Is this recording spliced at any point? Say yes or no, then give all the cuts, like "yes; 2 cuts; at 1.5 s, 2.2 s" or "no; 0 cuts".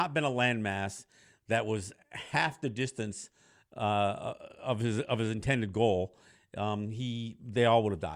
no; 0 cuts